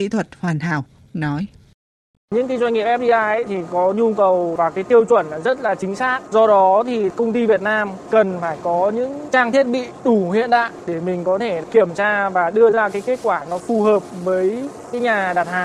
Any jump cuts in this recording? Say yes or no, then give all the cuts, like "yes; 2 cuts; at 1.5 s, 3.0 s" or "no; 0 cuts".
no; 0 cuts